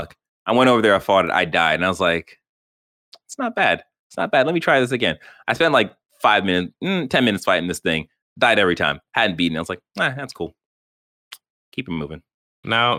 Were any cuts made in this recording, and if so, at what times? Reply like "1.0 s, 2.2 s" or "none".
none